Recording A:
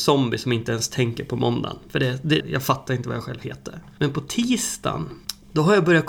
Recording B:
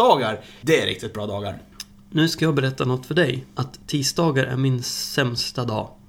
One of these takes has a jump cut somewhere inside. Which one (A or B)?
A